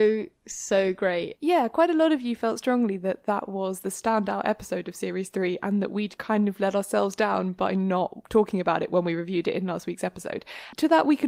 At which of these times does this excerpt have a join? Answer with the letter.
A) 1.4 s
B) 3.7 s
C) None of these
A